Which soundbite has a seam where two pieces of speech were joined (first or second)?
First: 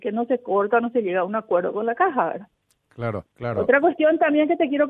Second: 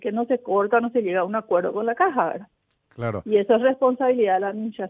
first